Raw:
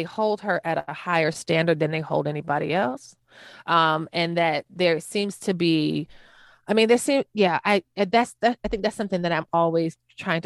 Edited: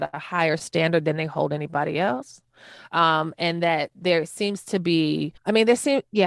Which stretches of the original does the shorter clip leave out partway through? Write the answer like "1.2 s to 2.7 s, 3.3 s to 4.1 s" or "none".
6.1 s to 6.6 s